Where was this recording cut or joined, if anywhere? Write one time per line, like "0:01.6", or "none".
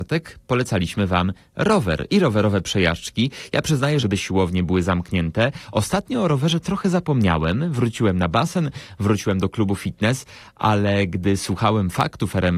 0:04.0